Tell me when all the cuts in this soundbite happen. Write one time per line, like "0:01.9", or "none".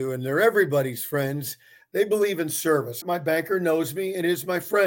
0:03.0